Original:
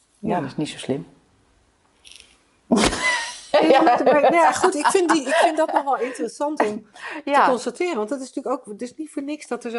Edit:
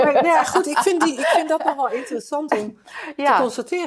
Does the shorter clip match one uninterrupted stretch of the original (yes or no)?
yes